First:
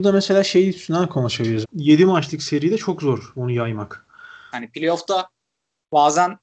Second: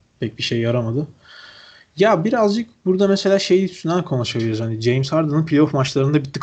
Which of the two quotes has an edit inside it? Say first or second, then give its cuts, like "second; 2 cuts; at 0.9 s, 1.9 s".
first; 2 cuts; at 1.6 s, 4.5 s